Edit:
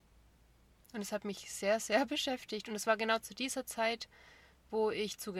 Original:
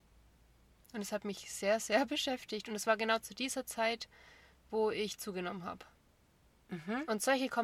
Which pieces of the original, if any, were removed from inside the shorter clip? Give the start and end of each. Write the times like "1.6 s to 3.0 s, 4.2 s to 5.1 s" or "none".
none